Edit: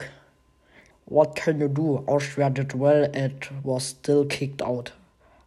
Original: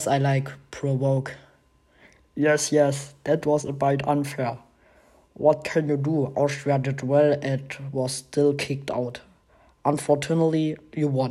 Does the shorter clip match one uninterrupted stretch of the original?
no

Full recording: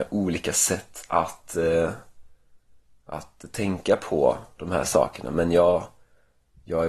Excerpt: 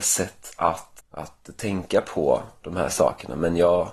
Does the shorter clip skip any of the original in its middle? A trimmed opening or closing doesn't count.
yes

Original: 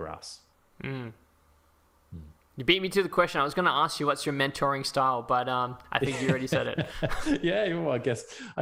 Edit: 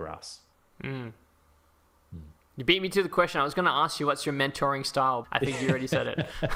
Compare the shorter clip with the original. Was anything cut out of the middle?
yes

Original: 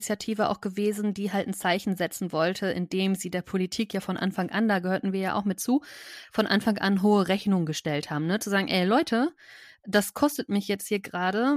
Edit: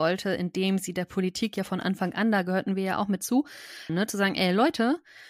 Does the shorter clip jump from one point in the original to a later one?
yes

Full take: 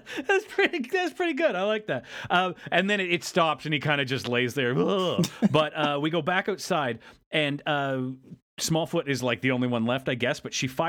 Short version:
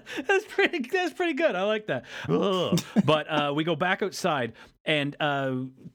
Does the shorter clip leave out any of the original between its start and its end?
yes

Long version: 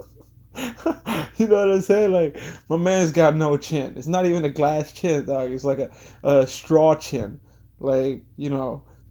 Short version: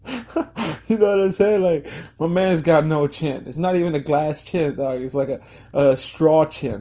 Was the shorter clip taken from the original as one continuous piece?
yes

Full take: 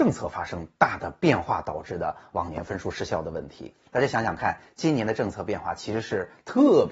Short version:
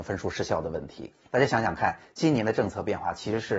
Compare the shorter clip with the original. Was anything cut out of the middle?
no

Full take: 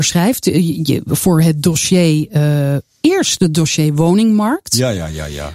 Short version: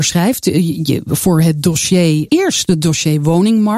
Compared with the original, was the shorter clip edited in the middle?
yes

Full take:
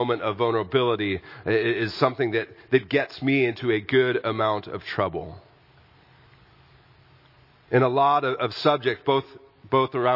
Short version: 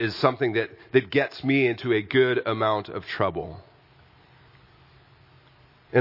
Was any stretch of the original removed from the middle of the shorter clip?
no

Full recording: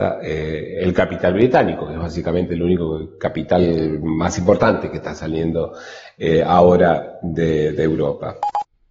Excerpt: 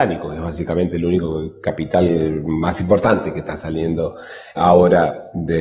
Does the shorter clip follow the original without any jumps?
no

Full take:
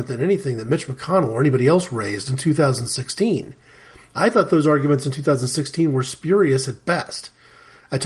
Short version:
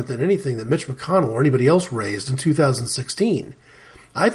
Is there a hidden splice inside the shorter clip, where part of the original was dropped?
no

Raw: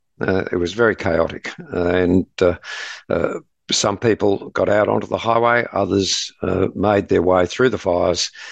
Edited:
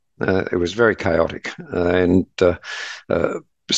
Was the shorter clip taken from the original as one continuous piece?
yes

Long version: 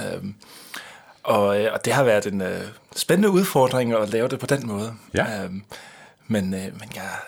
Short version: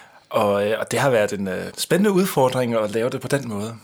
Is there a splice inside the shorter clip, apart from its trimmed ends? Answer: yes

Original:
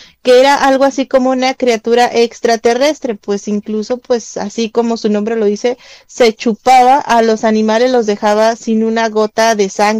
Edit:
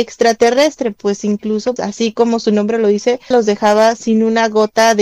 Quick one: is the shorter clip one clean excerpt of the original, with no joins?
no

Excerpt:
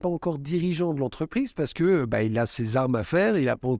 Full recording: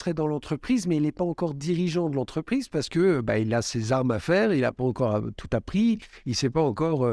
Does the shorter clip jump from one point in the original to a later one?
no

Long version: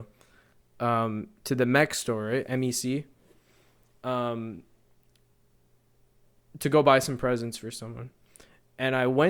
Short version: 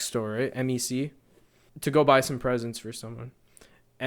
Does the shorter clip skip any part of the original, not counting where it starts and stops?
yes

